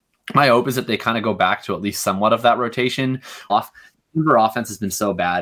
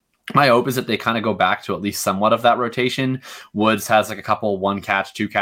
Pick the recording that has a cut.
first; 1 cut; at 3.5 s

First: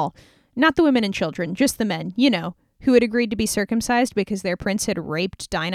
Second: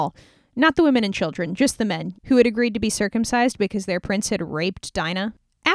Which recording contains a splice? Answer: second; 1 cut; at 2.1 s

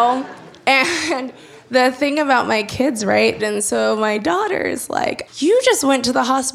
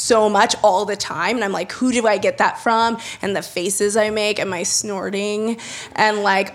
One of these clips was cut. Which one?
first; 2 cuts; at 3.4 s, 5.3 s

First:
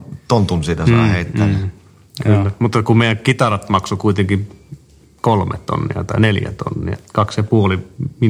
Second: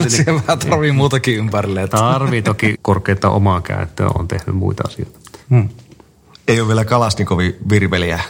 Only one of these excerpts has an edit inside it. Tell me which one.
second; 2 cuts; at 2.8 s, 5.4 s

